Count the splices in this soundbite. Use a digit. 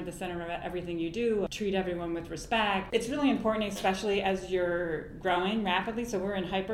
2